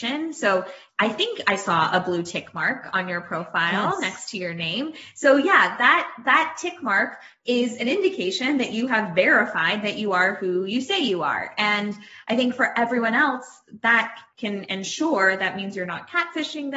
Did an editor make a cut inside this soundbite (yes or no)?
no